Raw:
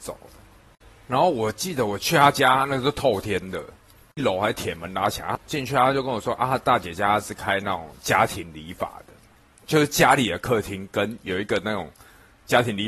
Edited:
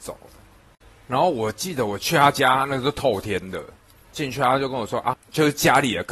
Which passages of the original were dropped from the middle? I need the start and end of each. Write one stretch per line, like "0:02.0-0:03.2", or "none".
0:04.0-0:05.4
0:06.5-0:09.5